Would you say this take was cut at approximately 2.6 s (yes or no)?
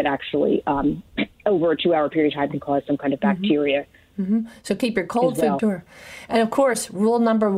yes